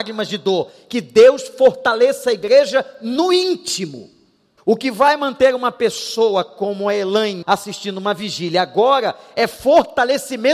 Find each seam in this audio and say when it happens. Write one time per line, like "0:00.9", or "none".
0:04.6
0:07.4